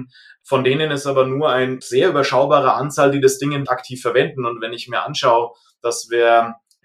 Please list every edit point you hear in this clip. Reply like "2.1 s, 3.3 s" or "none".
3.7 s